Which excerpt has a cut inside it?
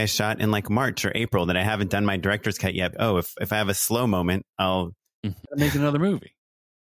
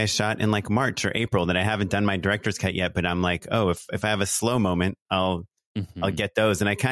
first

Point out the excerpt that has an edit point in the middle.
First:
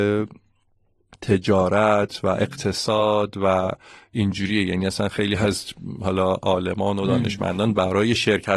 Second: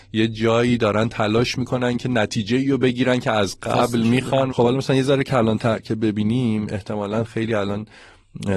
second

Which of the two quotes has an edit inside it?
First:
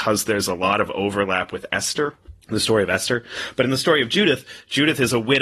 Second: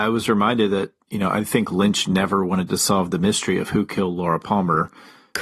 first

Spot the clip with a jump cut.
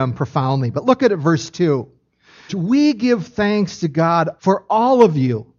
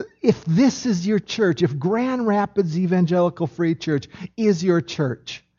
first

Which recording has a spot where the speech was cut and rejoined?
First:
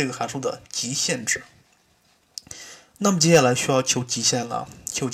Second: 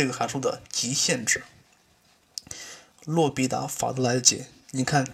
second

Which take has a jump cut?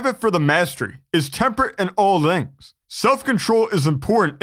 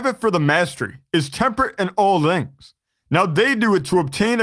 first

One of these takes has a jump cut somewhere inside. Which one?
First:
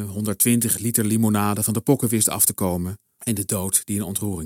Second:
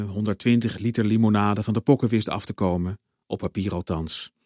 first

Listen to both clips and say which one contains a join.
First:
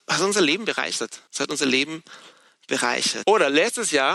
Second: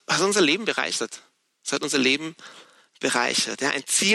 first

